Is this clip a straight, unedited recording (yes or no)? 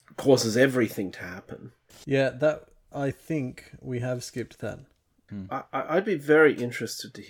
no